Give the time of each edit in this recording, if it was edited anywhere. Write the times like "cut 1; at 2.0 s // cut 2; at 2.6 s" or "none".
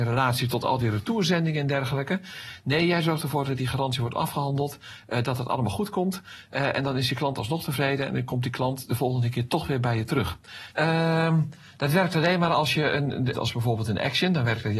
cut 1; at 10.7 s // cut 2; at 13.3 s